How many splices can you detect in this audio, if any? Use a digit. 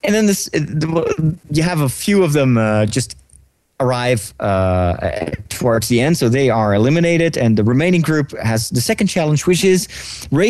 0